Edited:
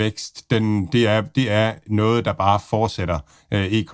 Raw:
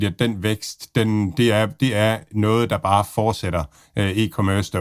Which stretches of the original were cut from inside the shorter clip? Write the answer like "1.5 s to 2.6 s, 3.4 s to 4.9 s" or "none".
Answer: none